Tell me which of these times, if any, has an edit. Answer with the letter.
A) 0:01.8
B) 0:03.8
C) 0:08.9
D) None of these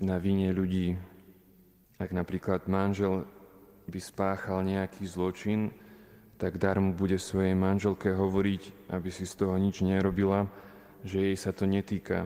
A